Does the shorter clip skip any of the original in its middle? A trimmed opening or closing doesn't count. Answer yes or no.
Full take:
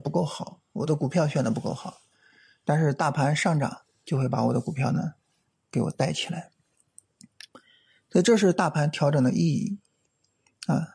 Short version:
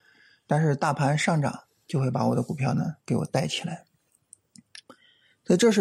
yes